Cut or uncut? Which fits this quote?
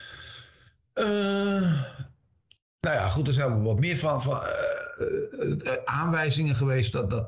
uncut